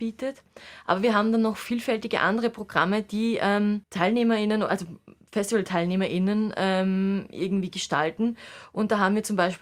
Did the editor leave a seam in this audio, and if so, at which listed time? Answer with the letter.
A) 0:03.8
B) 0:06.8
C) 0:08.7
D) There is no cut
A